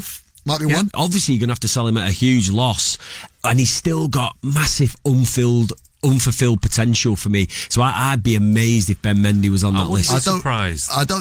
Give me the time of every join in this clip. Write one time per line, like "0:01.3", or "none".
0:00.9